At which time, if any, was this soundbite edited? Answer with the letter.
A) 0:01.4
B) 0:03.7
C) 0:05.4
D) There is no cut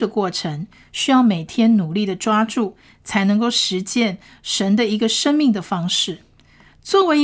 D